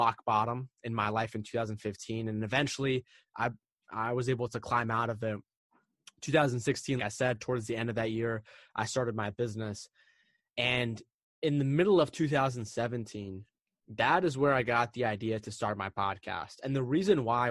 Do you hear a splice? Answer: yes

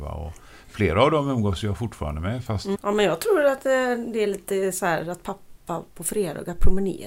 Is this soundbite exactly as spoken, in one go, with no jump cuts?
no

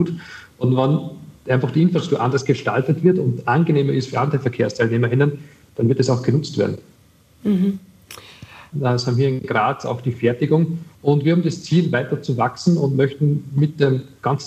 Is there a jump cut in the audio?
yes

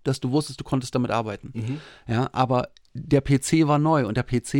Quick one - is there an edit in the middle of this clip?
no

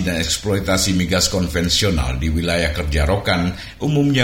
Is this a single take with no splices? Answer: yes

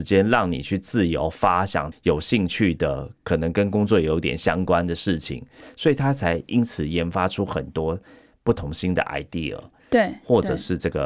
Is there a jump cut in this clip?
yes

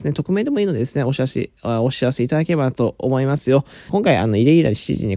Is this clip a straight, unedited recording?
no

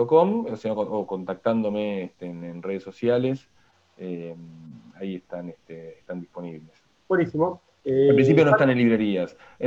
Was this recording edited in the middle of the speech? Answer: no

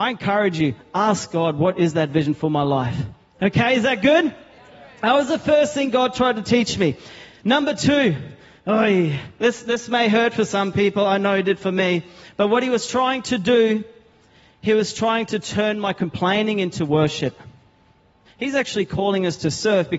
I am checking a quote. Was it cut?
yes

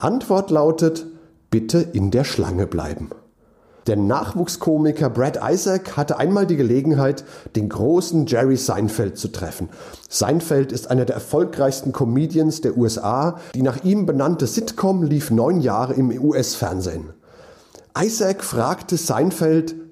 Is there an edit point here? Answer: yes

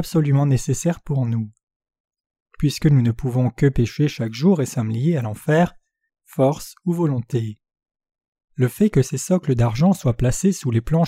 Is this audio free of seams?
no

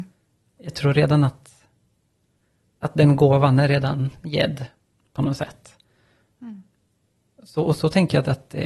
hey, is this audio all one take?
no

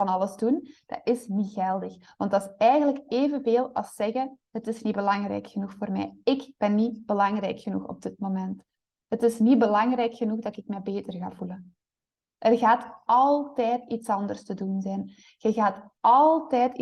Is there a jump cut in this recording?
no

